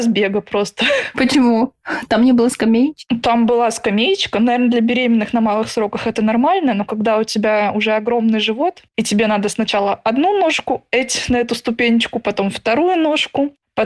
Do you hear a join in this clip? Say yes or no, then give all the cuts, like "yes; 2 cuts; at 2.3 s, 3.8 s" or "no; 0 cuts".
no; 0 cuts